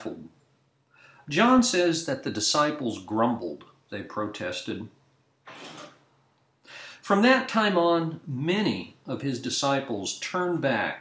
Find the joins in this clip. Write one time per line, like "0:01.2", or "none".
0:03.9
0:08.2